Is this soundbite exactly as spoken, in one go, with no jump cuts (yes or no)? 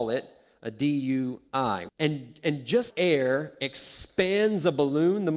no